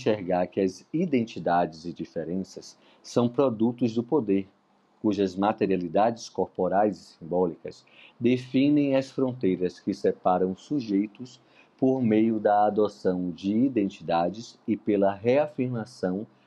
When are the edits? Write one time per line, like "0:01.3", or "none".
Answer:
none

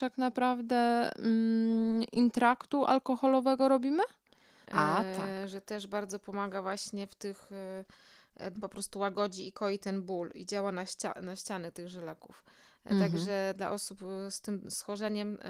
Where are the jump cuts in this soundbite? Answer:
0:04.6
0:08.5

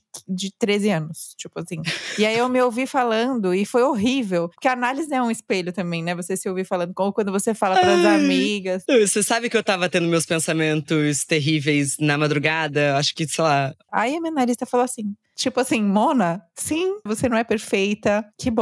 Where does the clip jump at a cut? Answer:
0:13.9
0:17.1

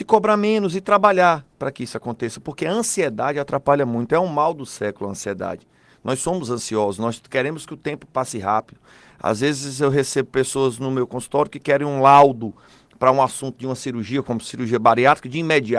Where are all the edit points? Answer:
none

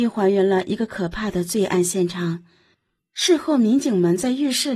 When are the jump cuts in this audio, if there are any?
0:03.0

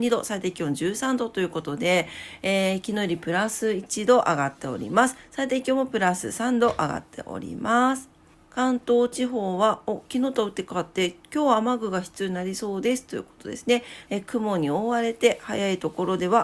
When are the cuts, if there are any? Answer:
0:08.3
0:14.1

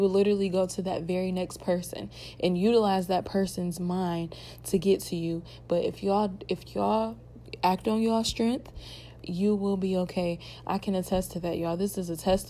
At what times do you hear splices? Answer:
0:09.2

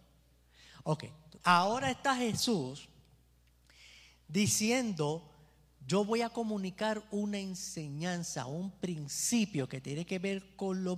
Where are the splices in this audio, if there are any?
0:01.4

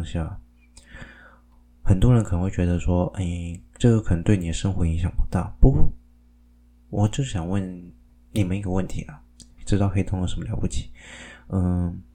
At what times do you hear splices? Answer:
0:09.6

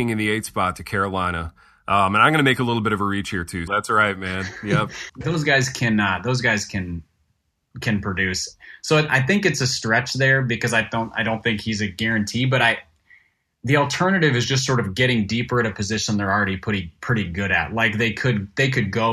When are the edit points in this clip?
0:03.7
0:05.1

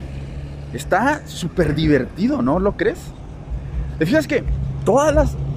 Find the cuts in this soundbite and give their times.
none

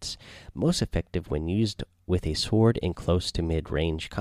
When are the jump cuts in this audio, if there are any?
none

